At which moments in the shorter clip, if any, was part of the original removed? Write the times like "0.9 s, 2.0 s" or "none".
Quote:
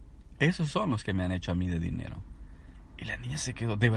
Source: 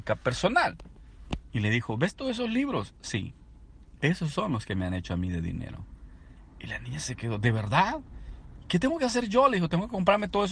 none